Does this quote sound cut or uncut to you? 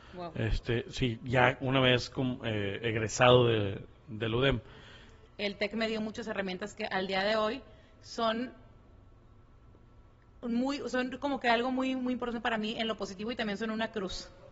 cut